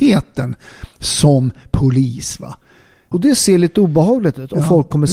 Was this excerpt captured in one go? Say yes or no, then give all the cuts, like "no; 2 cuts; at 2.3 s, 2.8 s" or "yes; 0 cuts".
no; 1 cut; at 3.1 s